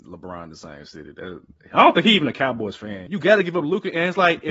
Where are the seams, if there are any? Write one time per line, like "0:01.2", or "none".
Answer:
0:03.1